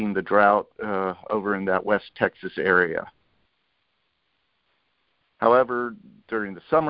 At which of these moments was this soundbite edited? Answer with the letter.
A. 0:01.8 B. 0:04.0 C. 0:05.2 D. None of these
C